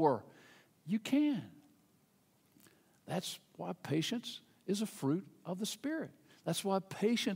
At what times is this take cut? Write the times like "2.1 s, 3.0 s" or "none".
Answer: none